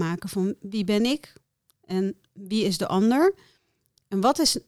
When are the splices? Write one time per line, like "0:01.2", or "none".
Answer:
none